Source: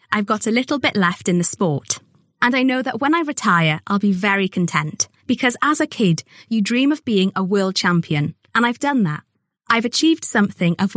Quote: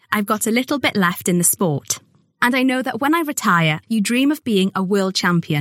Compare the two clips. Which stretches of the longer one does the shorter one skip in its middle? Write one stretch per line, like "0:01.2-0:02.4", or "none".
0:03.8-0:06.4